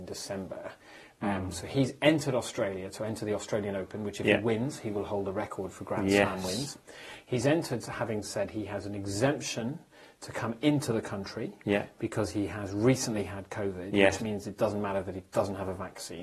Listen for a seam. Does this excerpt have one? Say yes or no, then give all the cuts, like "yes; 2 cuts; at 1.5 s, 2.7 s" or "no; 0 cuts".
yes; 1 cut; at 14.2 s